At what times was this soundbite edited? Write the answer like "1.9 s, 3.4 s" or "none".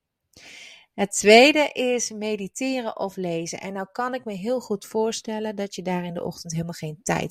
none